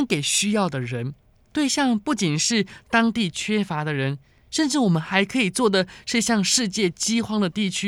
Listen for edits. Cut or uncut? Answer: cut